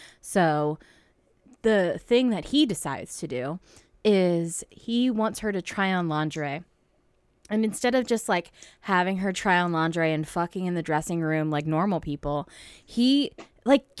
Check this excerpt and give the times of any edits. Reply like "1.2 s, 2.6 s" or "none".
none

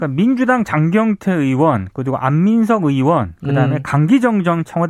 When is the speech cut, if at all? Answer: none

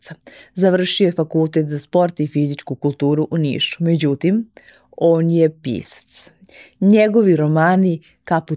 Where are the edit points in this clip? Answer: none

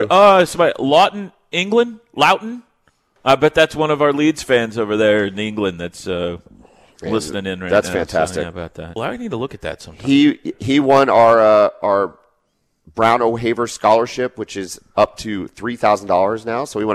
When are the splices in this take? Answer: 9.0 s

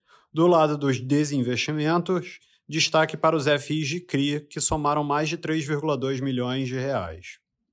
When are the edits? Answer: none

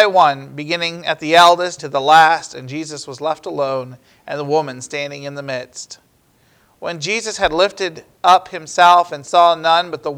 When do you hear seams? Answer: 1.8 s

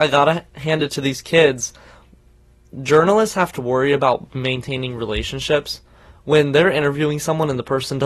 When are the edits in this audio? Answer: none

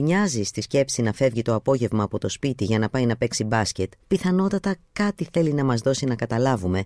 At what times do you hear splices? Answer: 4.0 s

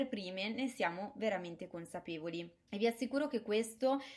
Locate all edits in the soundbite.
2.7 s

